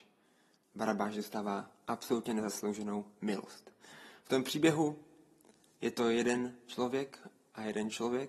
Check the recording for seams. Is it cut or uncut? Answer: uncut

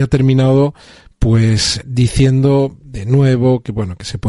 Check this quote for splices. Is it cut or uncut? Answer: cut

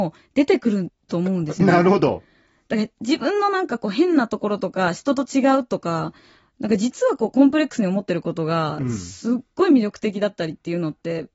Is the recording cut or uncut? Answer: uncut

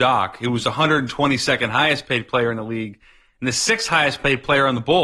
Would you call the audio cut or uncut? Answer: uncut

